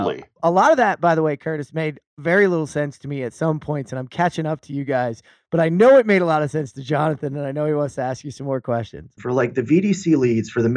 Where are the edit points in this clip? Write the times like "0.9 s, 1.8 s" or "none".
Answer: 9.2 s

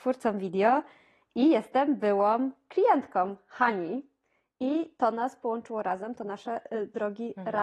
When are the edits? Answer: none

